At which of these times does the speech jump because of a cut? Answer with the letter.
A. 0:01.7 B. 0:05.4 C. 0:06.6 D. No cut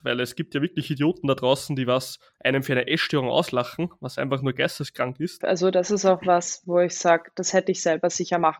B